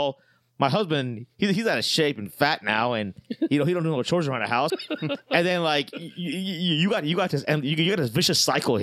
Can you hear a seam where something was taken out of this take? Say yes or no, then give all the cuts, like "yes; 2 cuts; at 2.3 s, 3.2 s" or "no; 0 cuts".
yes; 1 cut; at 4.7 s